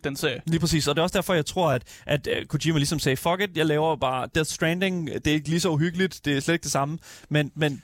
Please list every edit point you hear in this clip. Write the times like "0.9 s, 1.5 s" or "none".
none